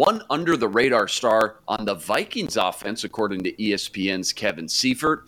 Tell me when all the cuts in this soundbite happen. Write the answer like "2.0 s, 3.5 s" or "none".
none